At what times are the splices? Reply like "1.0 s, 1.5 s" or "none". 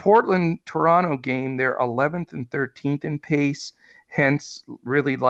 none

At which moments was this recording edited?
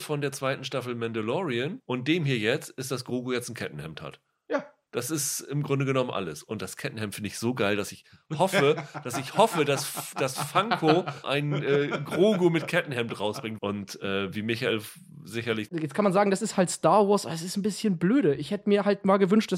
13.6 s, 15.7 s

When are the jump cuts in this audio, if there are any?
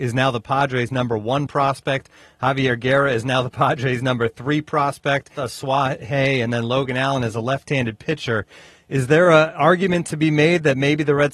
5.4 s

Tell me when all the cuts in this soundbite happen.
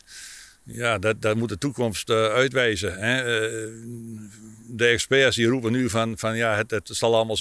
none

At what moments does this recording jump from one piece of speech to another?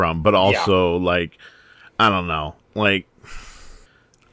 none

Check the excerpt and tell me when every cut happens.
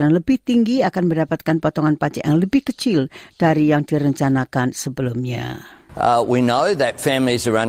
5.9 s

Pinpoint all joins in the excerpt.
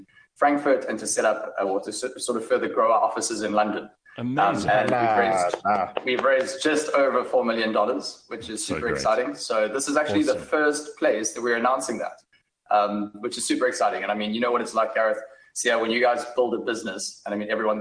none

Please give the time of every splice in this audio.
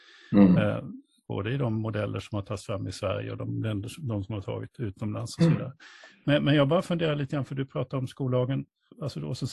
1.3 s

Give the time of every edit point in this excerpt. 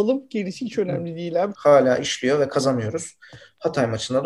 1.5 s

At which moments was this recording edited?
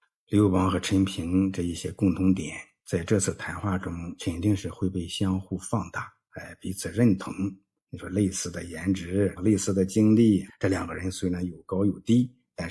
9.4 s, 10.5 s

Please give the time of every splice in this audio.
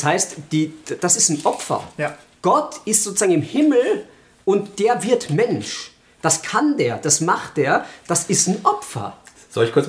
none

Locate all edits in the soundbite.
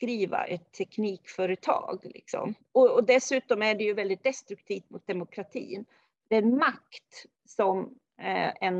2.6 s

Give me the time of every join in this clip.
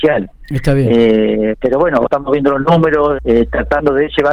2.1 s, 3.2 s

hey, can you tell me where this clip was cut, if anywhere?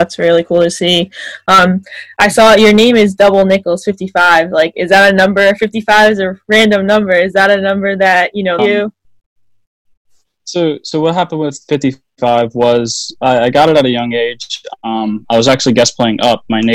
8.6 s

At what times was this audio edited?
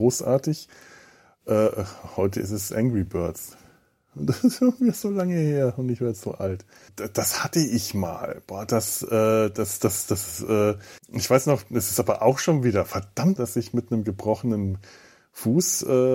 6.9 s, 11.0 s, 13.4 s

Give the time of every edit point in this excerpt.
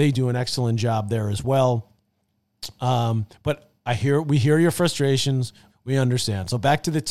5.7 s

